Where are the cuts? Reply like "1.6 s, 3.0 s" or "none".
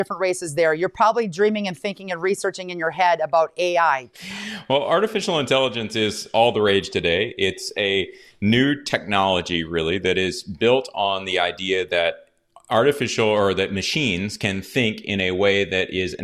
4.1 s